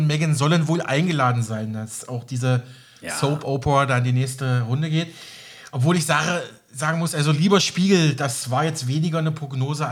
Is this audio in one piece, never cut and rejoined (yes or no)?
yes